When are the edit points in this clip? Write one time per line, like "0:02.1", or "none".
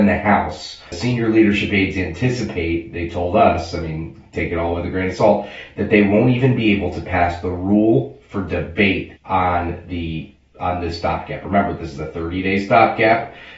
0:00.9
0:09.2
0:10.4